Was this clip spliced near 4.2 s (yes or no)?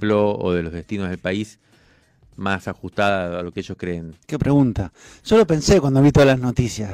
yes